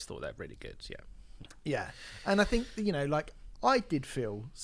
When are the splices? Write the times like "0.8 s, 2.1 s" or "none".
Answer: 3.6 s

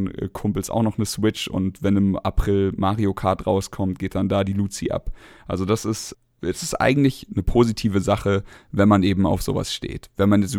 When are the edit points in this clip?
none

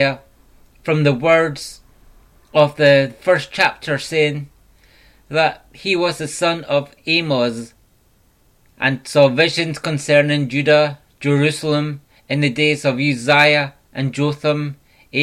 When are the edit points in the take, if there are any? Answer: none

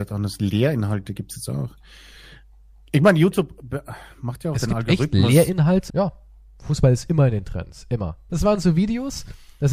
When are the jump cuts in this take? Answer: 5.9 s, 8.3 s

